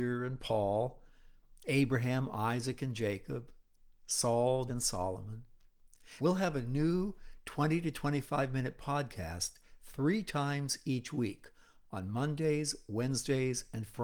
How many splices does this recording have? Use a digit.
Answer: 2